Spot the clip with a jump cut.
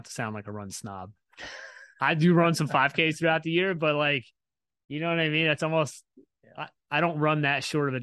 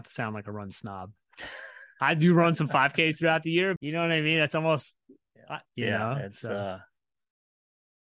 second; 2 cuts; at 3.8 s, 5.7 s

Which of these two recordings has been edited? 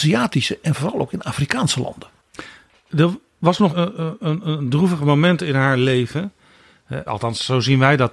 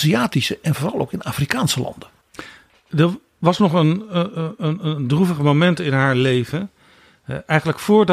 first; 2 cuts; at 3.7 s, 7.1 s

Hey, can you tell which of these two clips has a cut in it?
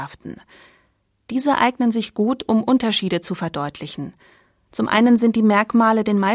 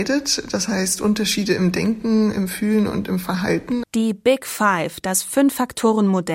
second; 1 cut; at 3.8 s

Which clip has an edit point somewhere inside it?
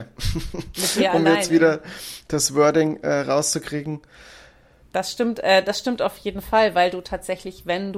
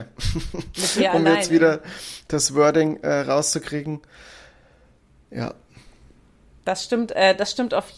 first; 1 cut; at 4.8 s

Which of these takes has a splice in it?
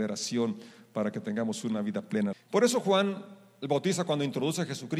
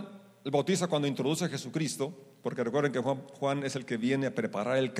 first; 1 cut; at 2.3 s

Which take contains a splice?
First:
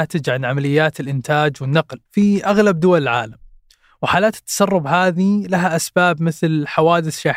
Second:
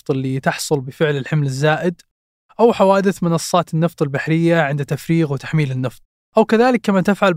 first; 1 cut; at 2.1 s

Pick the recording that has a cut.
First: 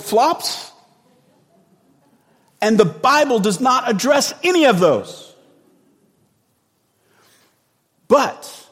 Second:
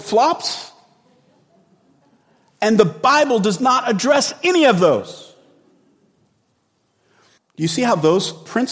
second; 1 cut; at 7.4 s

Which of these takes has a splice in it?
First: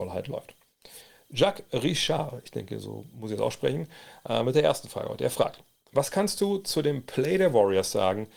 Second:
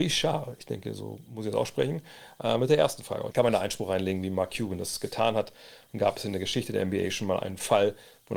second; 1 cut; at 3.3 s

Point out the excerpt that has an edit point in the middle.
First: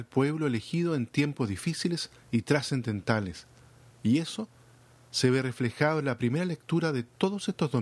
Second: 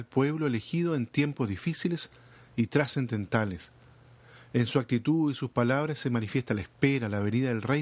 first; 2 cuts; at 2.2 s, 3.9 s

